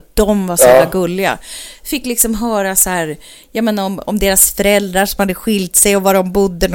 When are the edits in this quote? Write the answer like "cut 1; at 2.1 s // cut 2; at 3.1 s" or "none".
none